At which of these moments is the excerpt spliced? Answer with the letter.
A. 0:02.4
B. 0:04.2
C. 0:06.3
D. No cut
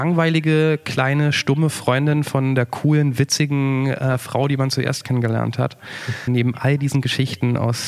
C